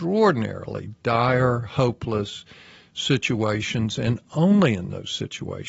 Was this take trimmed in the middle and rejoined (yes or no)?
no